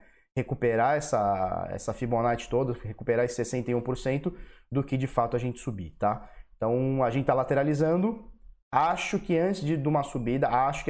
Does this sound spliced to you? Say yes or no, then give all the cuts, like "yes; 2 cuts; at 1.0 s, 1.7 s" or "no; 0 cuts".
no; 0 cuts